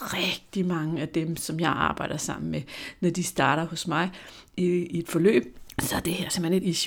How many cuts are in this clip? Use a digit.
0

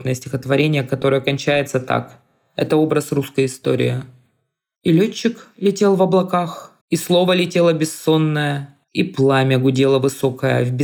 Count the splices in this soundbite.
2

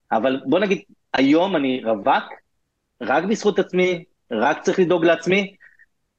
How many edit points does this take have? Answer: 0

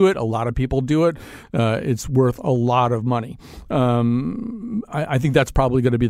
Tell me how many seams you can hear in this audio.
1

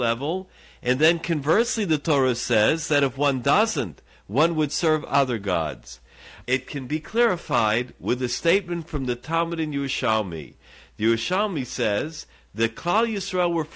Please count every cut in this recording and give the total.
1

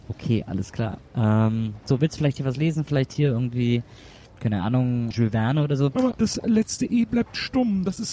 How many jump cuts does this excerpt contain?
2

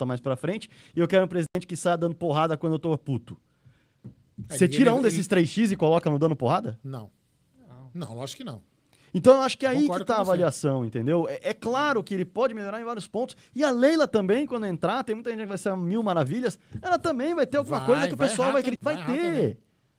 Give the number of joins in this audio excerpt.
1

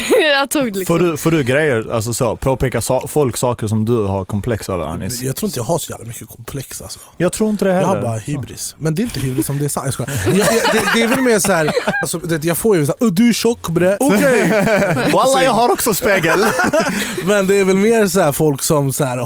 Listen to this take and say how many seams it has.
3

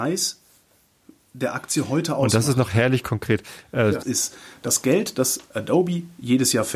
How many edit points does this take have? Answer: 1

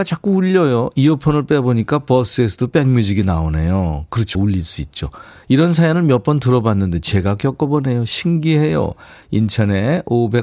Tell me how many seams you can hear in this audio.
0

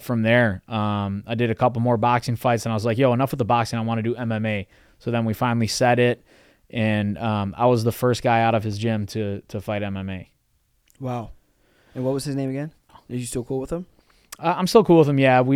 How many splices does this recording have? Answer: 1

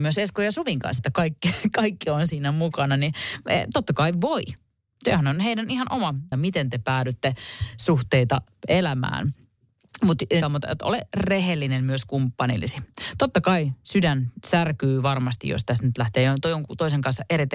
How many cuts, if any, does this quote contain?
3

